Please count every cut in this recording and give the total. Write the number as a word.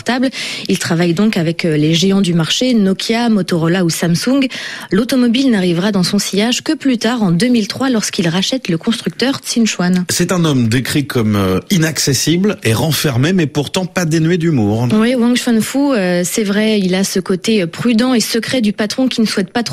zero